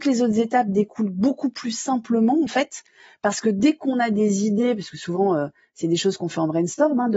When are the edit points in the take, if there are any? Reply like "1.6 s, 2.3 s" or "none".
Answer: none

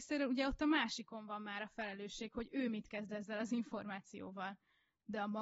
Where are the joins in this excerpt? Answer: none

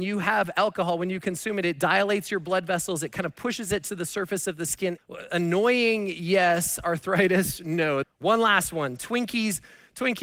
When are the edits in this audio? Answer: 5.0 s, 8.0 s

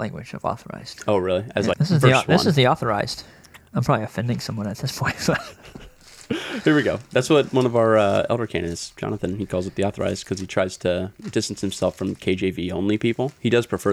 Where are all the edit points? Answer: 1.7 s

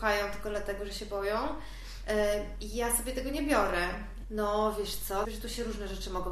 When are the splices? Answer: 4.2 s, 5.2 s

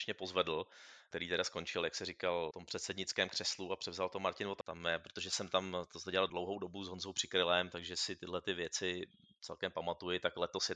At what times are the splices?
4.6 s

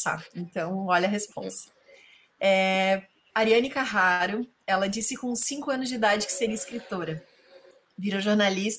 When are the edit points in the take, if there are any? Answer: none

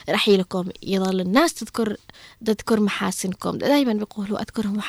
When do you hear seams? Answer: none

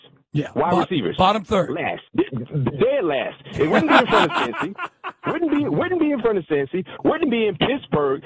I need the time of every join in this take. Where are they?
2.1 s

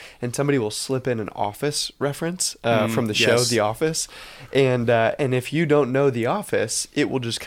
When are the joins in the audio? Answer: none

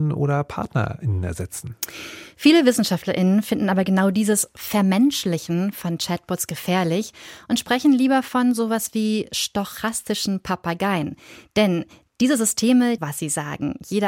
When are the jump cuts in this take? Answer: 13.0 s

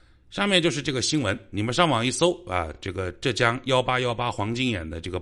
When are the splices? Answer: none

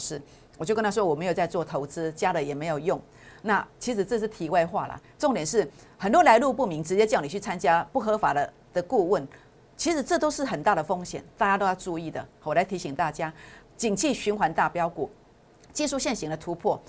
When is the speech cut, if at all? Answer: 13.6 s

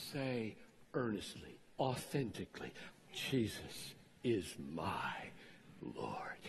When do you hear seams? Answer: 1.8 s, 2.9 s

